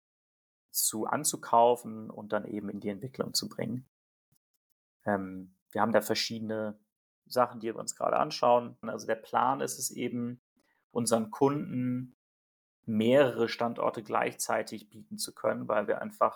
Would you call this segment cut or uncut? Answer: cut